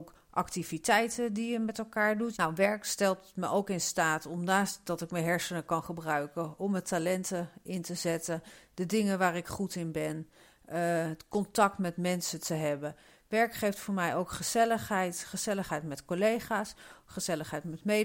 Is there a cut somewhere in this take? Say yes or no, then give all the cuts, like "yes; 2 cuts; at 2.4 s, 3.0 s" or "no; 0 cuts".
yes; 1 cut; at 2.3 s